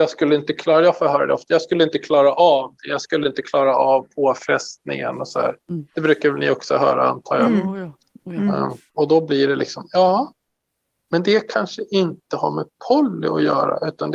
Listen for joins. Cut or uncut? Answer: uncut